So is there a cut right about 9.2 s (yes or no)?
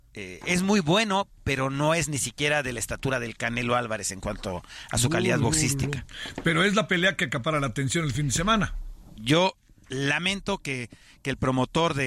yes